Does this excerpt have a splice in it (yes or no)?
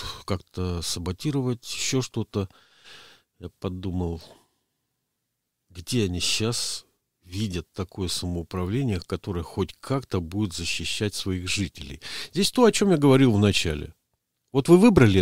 no